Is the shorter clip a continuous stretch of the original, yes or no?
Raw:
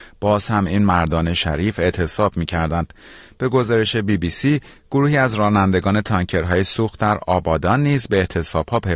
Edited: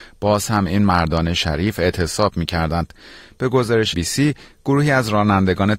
no